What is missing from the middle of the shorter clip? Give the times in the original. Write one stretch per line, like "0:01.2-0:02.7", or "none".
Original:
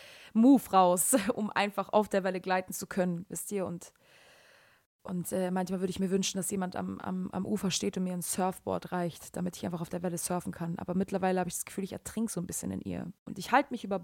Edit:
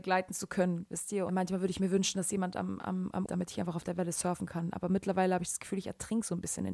0:03.7-0:05.5
0:07.5-0:09.3